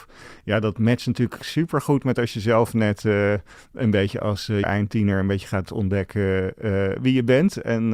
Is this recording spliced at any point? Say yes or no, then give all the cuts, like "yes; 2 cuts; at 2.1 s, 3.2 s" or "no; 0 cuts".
yes; 1 cut; at 4.6 s